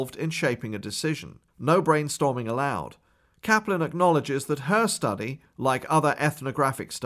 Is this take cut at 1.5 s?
yes; 1 cut; at 1.5 s

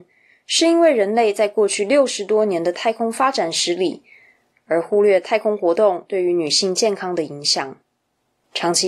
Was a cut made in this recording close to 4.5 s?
yes; 1 cut; at 4.5 s

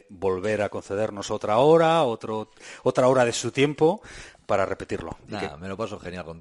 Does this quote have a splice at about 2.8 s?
no; 0 cuts

